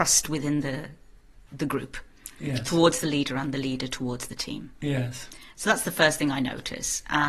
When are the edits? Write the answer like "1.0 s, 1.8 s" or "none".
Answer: none